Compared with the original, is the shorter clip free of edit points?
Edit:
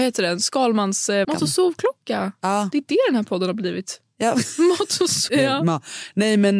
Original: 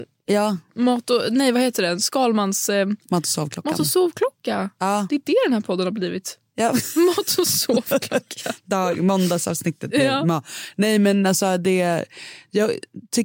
no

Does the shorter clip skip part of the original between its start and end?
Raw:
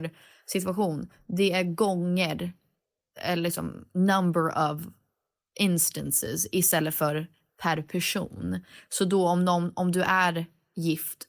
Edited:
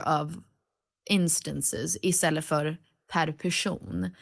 no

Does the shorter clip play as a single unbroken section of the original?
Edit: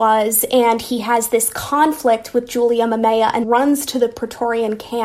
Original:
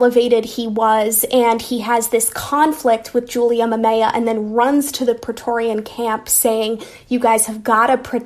no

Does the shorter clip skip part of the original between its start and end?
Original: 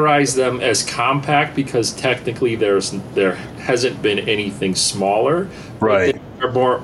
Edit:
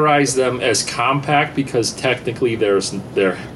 no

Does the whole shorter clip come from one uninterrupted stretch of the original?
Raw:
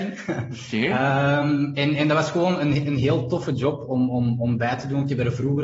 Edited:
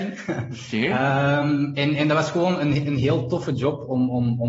yes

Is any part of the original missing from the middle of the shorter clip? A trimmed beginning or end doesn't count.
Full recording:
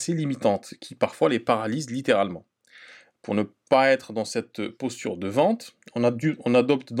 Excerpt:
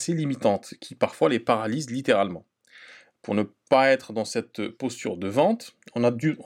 no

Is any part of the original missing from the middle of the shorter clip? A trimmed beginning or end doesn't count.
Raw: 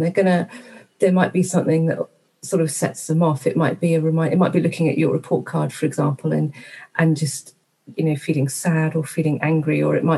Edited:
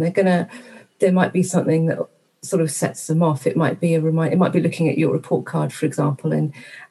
no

